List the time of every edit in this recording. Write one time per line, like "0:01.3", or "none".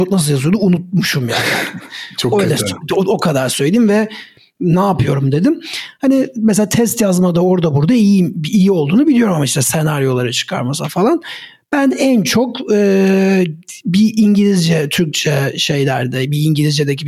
none